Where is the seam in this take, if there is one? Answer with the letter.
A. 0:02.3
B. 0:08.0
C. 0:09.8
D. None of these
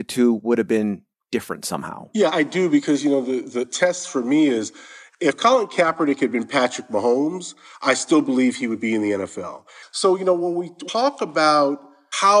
A